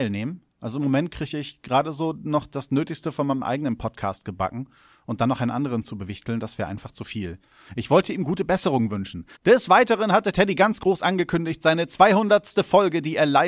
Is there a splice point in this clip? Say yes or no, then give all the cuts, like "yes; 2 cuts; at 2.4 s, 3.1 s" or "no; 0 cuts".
yes; 2 cuts; at 7.7 s, 9.4 s